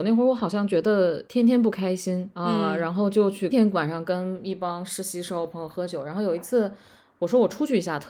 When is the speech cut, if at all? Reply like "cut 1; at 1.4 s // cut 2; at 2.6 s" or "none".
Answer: cut 1; at 3.5 s